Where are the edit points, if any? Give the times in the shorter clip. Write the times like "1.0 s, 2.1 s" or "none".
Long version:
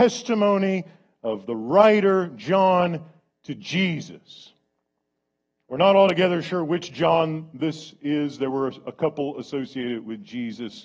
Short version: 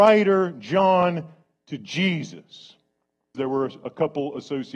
3.3 s